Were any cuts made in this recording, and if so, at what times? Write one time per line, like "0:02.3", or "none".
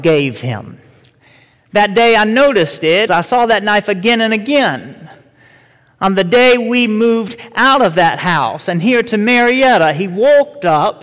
0:03.1